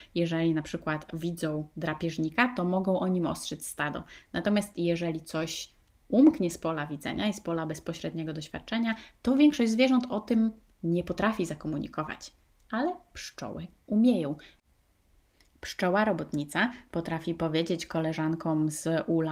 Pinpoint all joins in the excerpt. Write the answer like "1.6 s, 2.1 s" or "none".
none